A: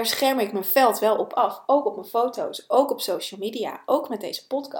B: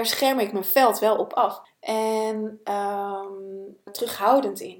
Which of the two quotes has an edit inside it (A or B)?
B